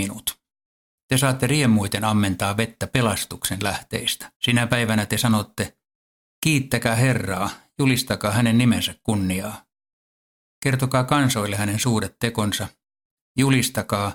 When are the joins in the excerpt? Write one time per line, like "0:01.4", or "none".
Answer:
0:04.4